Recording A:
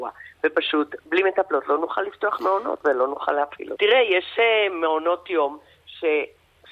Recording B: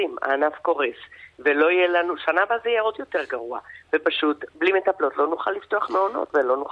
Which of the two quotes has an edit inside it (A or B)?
A